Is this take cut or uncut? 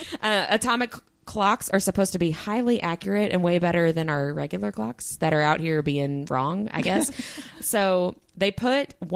uncut